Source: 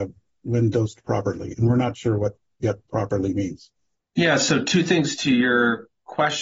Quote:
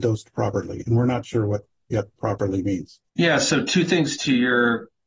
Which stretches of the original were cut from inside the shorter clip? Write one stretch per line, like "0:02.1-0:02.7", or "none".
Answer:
0:03.8-0:04.1